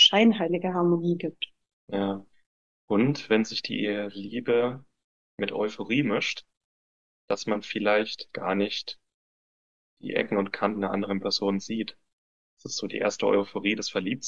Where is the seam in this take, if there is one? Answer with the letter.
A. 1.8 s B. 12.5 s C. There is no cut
A